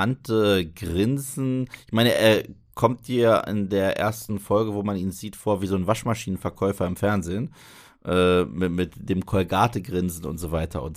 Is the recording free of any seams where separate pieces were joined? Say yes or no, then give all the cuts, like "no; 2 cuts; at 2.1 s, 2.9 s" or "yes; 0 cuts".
yes; 0 cuts